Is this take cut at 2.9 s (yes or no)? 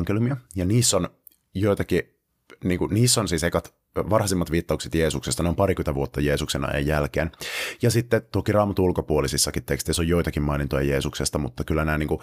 no